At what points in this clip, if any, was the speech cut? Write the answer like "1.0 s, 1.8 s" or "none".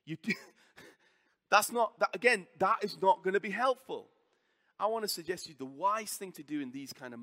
none

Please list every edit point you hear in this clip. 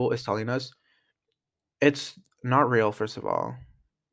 none

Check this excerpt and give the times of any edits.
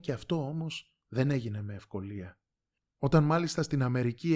2.8 s

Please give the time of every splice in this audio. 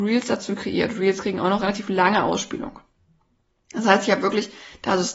none

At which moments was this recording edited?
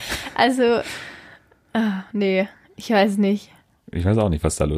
none

